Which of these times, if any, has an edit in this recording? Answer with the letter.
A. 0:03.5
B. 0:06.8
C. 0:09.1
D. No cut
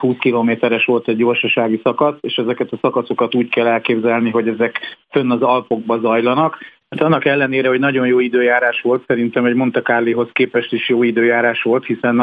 B